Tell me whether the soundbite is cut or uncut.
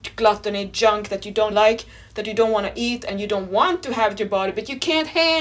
cut